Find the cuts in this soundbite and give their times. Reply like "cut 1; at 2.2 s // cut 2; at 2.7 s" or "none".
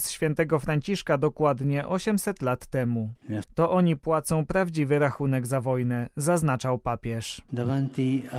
cut 1; at 3.4 s